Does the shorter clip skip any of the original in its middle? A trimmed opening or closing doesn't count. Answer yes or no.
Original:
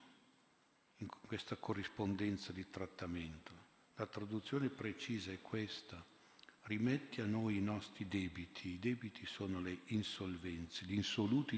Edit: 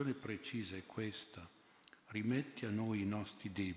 no